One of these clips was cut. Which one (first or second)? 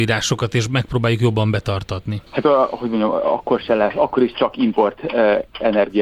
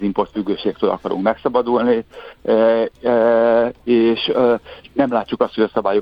first